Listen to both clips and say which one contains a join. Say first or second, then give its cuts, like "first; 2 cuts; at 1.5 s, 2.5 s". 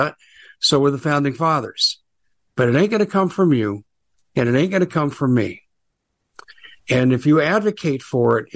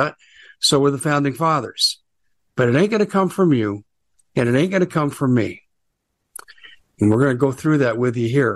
second; 1 cut; at 6.8 s